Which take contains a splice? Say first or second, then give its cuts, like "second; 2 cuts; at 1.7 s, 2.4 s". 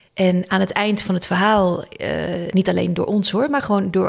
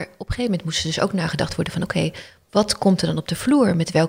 first; 1 cut; at 2.5 s